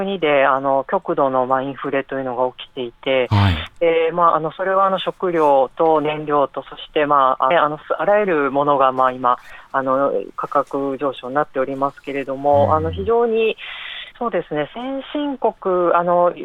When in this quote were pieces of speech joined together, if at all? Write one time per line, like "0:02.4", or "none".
0:07.5
0:14.1